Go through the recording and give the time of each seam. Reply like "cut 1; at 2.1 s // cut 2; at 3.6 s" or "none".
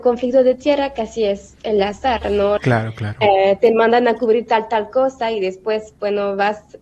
cut 1; at 2.6 s